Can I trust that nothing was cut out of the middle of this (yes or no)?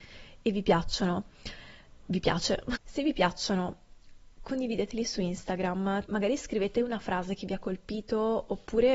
no